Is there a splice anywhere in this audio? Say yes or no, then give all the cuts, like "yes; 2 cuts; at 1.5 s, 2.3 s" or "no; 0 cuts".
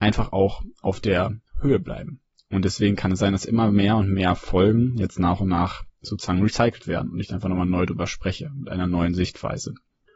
no; 0 cuts